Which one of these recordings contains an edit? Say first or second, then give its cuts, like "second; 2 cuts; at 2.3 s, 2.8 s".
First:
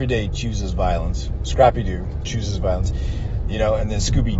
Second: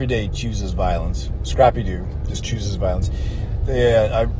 first; 2 cuts; at 2.2 s, 3.4 s